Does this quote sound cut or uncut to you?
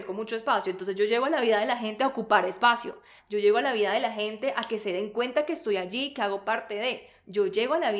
cut